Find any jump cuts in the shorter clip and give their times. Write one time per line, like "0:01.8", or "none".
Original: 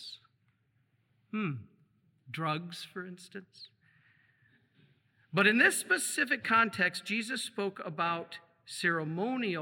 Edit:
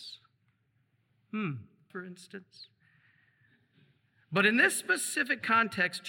0:01.9

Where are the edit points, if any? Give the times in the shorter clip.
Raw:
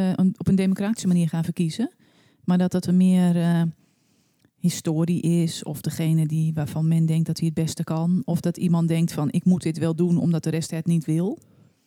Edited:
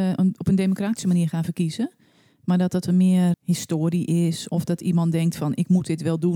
0:03.3
0:04.5

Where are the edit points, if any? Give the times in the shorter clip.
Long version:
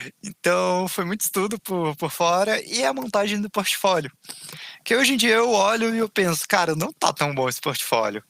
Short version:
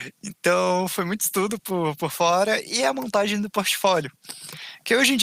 none

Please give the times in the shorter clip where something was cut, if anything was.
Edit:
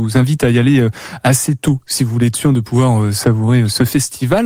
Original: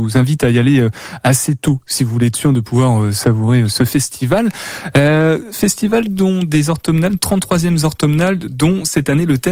none

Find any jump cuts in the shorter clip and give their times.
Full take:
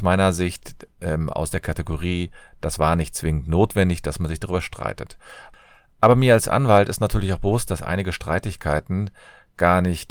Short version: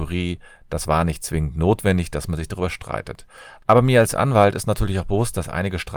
0:03.6

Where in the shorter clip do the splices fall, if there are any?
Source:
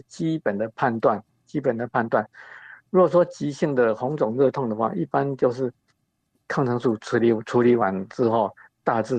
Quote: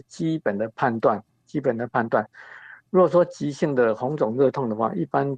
none

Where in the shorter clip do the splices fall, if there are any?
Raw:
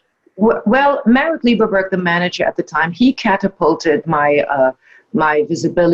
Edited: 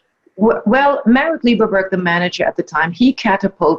none

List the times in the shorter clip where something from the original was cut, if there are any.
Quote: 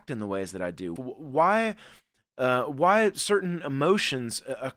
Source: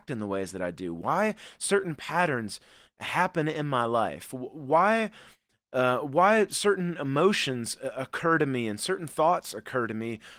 0:01.0

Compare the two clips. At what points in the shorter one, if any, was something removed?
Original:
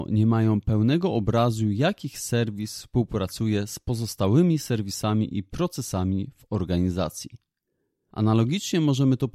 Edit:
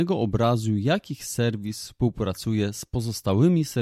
none

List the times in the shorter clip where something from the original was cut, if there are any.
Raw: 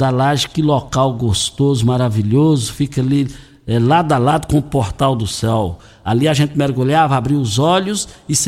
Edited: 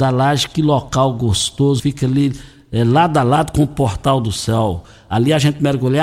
0:01.8

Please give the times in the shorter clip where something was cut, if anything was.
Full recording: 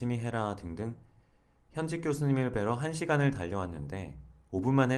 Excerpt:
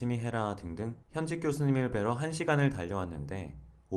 0:01.0

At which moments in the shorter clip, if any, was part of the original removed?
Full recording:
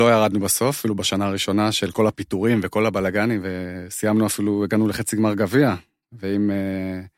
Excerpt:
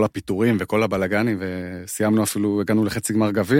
none

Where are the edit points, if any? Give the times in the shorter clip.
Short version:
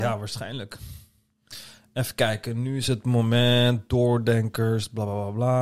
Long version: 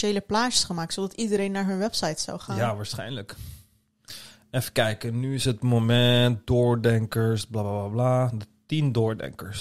none

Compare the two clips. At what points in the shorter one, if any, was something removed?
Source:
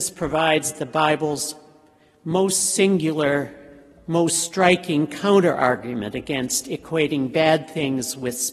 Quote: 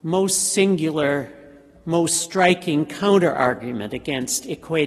none

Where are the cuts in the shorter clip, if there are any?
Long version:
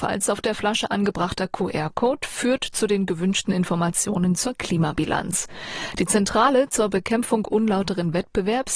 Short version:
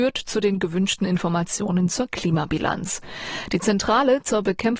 none

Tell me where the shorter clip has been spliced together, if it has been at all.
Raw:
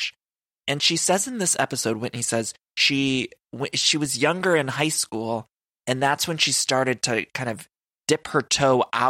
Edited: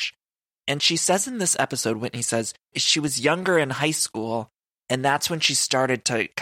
0:02.7

